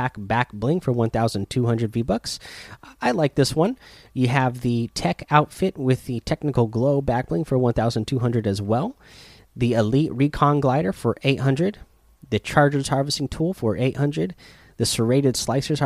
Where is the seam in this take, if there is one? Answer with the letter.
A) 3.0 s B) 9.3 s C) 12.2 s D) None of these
D